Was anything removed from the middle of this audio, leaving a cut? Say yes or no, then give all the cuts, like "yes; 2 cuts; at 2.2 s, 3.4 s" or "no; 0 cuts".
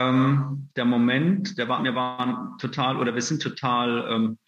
yes; 1 cut; at 1.8 s